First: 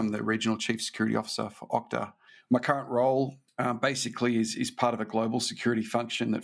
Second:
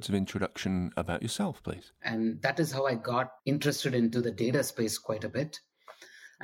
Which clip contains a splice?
second; 2 cuts; at 2.0 s, 3.4 s

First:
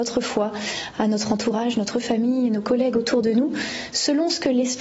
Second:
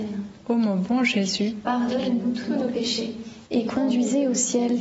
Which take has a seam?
second; 1 cut; at 3.5 s

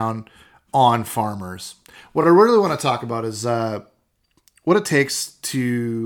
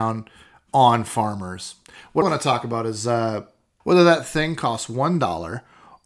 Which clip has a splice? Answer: second; 2 cuts; at 2.2 s, 3.8 s

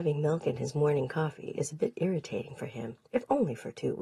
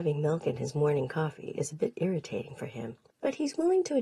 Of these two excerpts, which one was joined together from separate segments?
first; 1 cut; at 3.1 s

